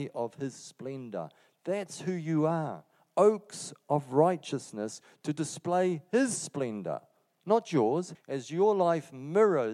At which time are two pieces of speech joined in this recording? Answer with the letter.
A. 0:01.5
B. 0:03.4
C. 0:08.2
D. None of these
C